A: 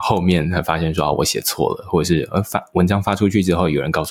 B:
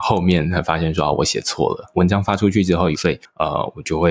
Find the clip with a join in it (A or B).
B